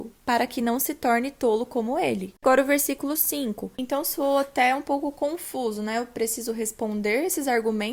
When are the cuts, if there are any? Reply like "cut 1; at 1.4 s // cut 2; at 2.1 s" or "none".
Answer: cut 1; at 3.7 s